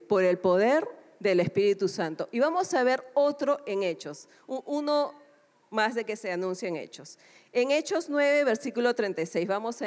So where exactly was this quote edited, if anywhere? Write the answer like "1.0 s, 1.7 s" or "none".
none

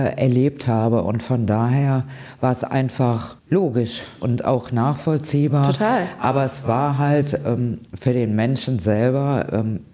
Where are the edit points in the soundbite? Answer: none

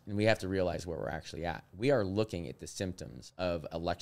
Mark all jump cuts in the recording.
none

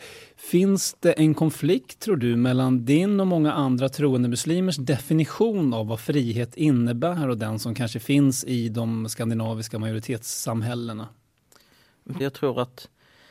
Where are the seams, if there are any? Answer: 12.2 s

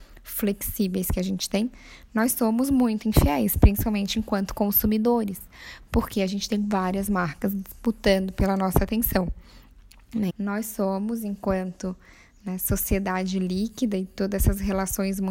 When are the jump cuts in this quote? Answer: 10.3 s

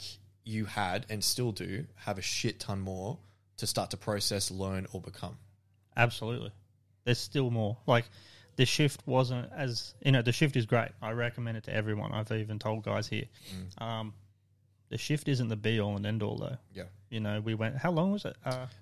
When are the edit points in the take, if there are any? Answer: none

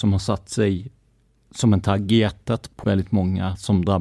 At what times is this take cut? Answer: 2.8 s

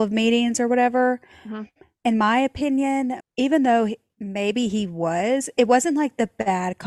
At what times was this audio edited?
3.2 s

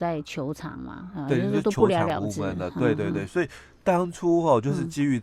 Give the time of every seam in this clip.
none

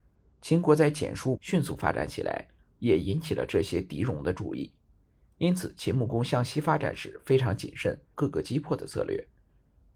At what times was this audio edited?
1.4 s, 8.1 s

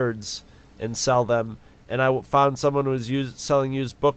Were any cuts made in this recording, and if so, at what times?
none

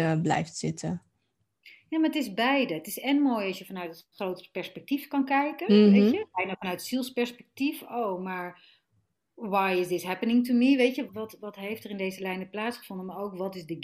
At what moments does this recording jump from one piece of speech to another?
11.1 s

